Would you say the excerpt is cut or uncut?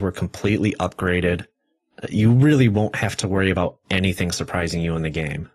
uncut